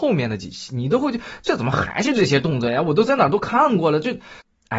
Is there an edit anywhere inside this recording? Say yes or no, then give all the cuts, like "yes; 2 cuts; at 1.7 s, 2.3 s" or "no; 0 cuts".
no; 0 cuts